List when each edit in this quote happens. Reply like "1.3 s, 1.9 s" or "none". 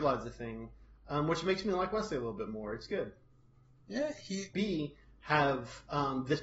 4.5 s

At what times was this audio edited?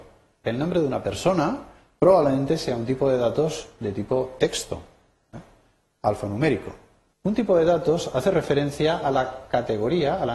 7.1 s

